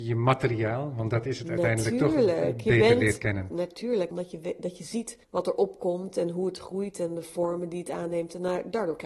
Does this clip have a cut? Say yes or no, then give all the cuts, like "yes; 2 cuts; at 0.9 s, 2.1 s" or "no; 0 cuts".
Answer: yes; 2 cuts; at 4.1 s, 5.2 s